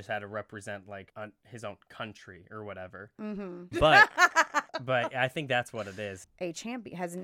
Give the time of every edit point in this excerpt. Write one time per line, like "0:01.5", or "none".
0:03.7
0:06.2

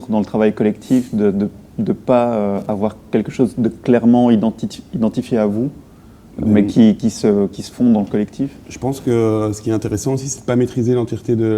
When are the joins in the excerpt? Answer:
none

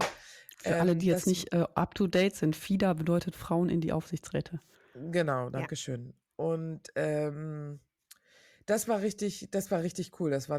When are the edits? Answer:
none

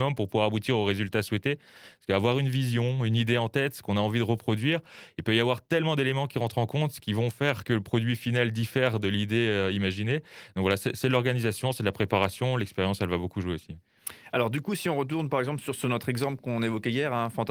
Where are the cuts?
none

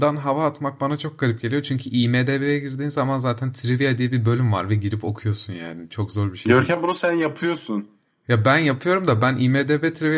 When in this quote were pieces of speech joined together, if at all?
none

